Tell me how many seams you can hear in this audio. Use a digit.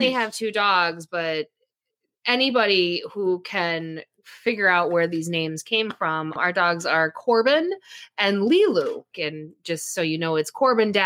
2